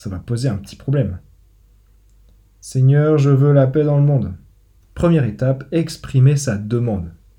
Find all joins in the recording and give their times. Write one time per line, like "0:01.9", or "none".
0:04.8